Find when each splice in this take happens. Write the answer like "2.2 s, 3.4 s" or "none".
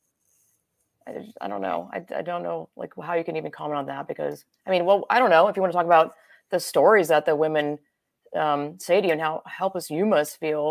none

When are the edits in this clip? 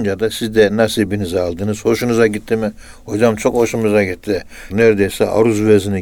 4.7 s

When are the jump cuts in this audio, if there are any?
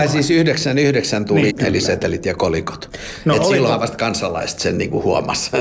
1.5 s

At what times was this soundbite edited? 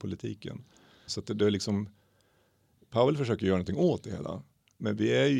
1.1 s

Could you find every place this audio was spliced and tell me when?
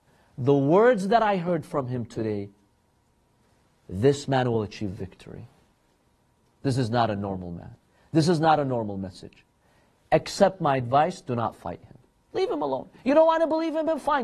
none

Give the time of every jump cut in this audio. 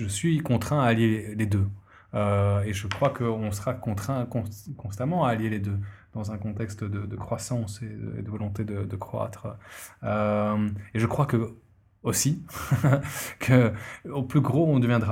none

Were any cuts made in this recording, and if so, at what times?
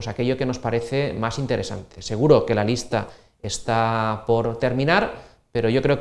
none

